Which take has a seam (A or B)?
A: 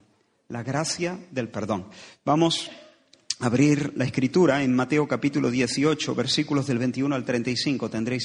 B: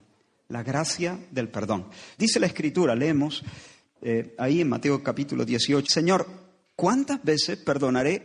B